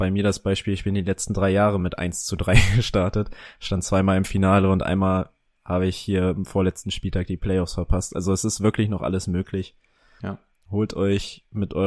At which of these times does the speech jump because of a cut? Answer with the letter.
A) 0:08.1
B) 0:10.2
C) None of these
B